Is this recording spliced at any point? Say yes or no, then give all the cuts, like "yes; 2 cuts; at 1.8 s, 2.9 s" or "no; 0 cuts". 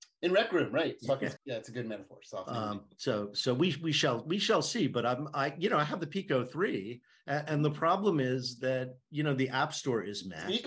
yes; 1 cut; at 1.4 s